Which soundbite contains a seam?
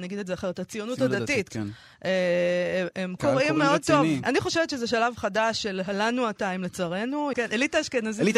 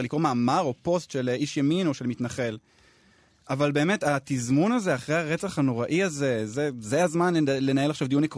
first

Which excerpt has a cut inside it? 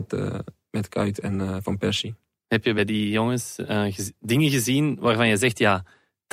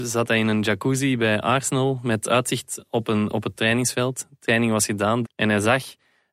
second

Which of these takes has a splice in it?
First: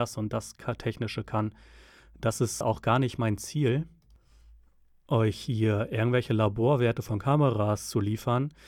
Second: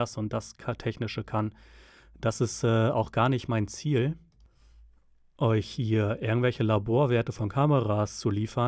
first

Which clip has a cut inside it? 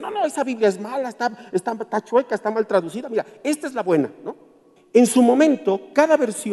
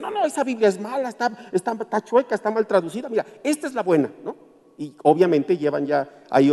first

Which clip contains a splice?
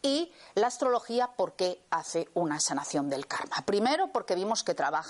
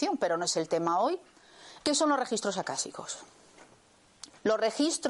second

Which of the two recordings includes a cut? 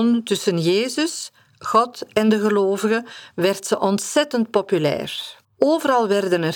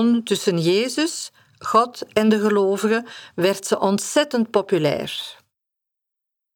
first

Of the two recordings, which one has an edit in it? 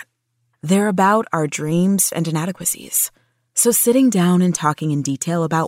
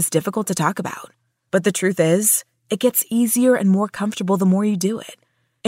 first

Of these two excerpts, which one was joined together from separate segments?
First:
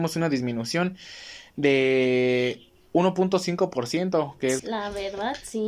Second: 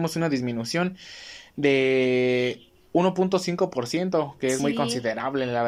first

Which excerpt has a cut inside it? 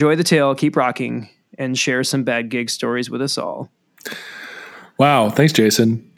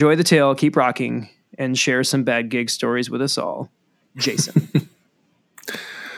first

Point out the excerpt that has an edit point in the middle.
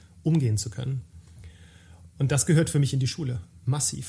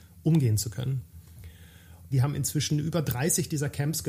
second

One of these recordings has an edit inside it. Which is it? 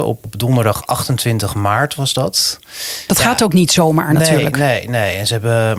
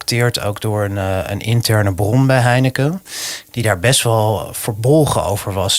first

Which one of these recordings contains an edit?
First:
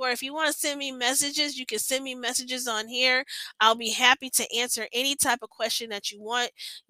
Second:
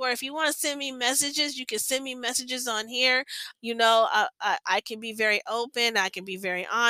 second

